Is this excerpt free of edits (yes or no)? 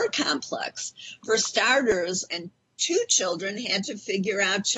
no